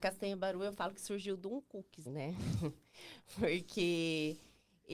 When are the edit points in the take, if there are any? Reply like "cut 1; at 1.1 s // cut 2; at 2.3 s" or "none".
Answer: cut 1; at 2.1 s